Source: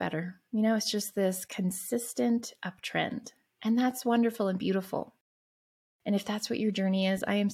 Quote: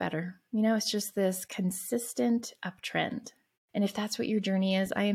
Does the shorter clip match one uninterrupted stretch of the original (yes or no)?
no